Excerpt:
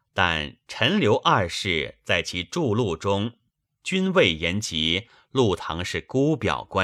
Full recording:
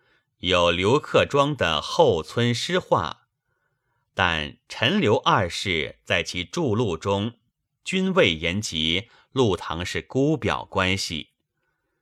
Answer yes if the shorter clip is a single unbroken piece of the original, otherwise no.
yes